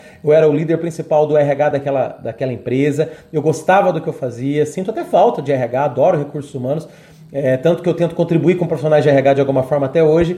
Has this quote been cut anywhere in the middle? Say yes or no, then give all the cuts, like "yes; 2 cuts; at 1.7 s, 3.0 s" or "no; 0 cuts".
no; 0 cuts